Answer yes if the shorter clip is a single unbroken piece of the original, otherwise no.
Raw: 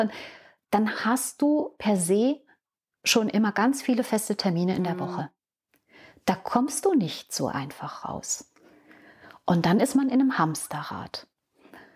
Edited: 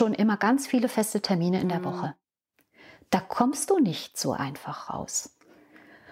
yes